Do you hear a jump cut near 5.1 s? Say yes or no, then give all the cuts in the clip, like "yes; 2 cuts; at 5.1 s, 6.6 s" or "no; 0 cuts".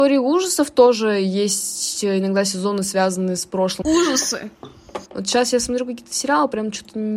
yes; 2 cuts; at 3.8 s, 5.1 s